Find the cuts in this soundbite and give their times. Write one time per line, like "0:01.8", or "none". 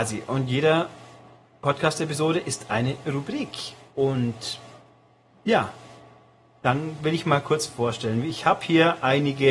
none

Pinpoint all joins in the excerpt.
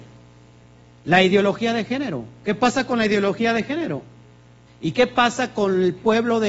0:04.7

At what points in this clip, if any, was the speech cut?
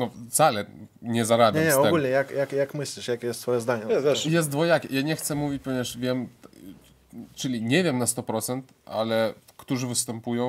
none

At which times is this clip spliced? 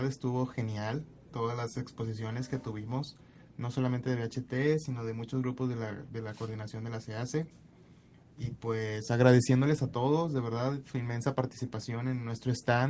none

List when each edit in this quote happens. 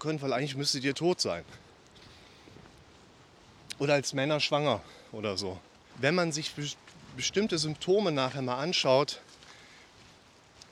0:05.9

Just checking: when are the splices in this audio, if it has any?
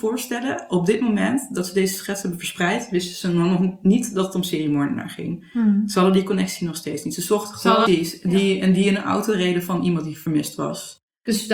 0:07.9

